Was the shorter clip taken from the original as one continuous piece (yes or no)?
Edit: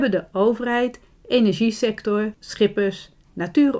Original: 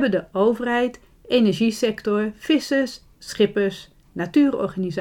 no